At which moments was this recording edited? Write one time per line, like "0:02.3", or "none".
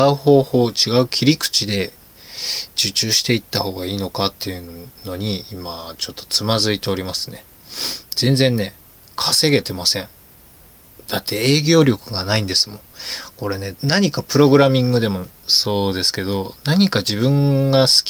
0:13.7